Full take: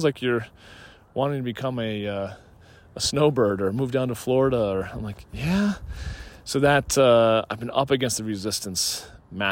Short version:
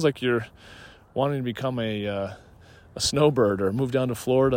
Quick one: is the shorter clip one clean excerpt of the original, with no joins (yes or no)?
yes